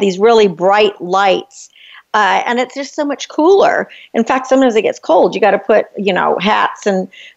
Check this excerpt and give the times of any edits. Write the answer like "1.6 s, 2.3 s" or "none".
none

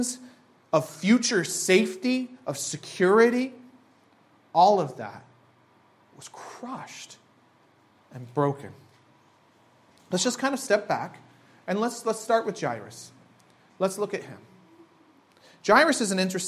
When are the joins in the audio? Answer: none

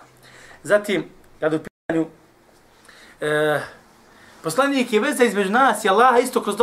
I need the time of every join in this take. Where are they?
none

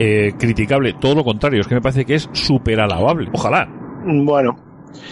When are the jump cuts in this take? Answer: 3.3 s

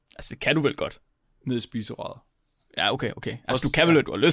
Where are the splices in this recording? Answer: none

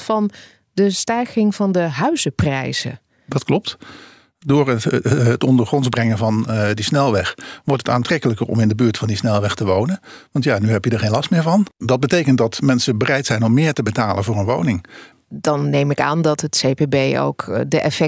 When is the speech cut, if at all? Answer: 11.7 s, 15.1 s

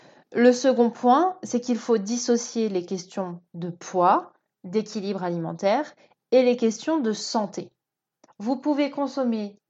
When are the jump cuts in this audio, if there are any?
8.3 s

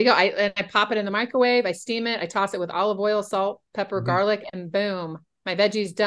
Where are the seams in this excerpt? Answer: none

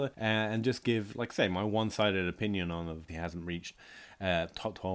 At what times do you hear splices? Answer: 3.1 s

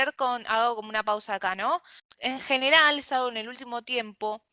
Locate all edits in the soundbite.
none

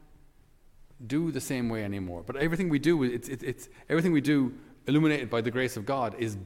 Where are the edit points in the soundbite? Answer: none

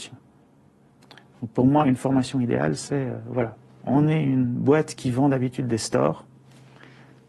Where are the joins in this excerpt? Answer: none

